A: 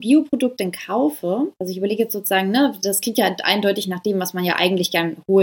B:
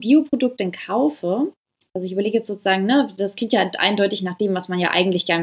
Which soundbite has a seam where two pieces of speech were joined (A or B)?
A